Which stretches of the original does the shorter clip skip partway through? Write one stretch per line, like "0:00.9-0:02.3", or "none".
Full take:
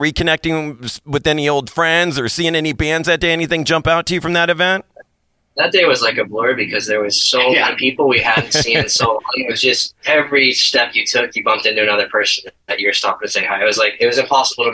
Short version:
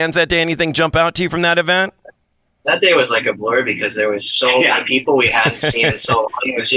none